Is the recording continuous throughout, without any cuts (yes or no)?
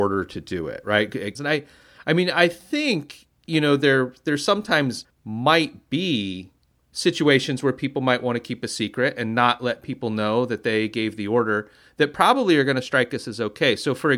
no